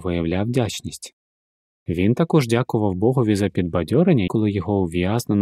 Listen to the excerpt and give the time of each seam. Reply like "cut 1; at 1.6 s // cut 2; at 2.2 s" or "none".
cut 1; at 1.8 s // cut 2; at 4.3 s